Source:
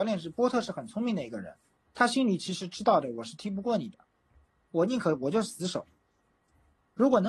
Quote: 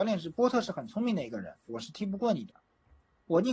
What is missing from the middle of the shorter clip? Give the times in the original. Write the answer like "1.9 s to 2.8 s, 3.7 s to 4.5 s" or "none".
1.7 s to 3.1 s